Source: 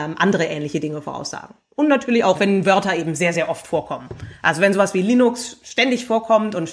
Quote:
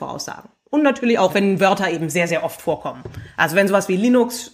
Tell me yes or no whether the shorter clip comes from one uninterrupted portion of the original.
yes